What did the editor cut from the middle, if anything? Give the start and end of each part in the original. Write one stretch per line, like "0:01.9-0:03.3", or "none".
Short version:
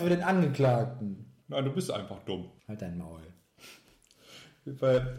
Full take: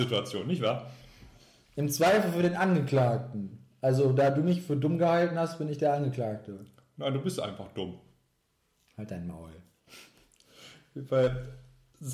0:03.7-0:06.9
0:08.1-0:08.9